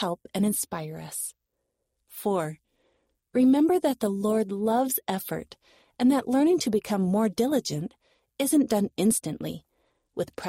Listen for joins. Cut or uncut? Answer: uncut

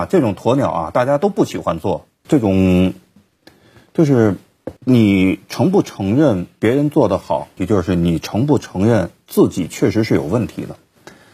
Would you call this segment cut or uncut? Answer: cut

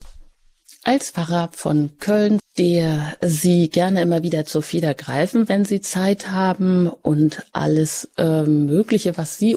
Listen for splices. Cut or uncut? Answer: cut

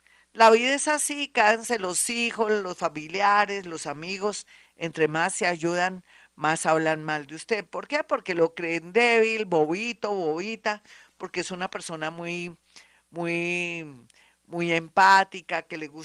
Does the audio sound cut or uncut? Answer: uncut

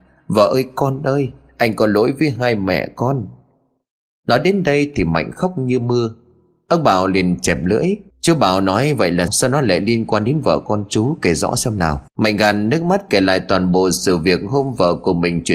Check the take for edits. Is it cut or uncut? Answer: cut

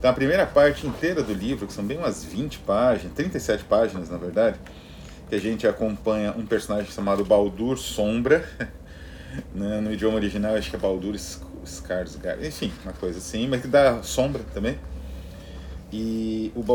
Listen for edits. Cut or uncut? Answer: uncut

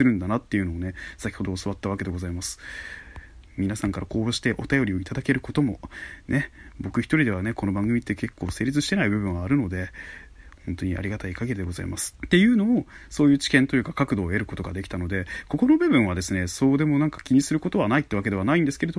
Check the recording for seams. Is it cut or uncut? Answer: cut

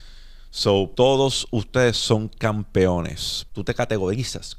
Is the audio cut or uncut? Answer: cut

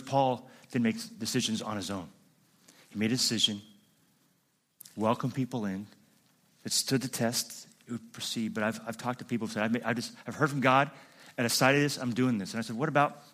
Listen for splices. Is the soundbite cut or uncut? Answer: uncut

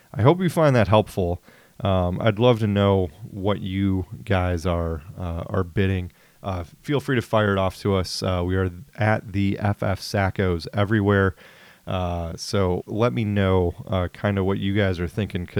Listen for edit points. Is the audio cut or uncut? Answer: cut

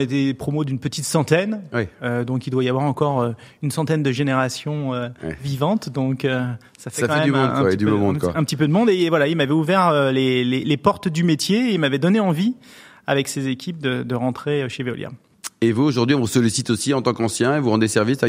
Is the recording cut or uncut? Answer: uncut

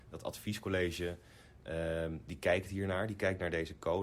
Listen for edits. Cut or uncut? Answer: uncut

